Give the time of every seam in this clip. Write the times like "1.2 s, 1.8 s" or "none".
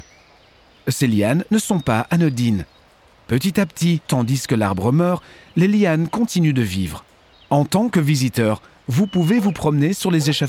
4.1 s, 7.3 s